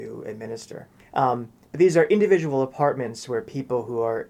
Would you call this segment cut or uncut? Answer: cut